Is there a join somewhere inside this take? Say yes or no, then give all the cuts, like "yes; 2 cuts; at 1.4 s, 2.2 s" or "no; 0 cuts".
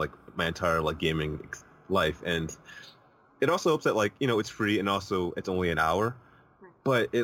no; 0 cuts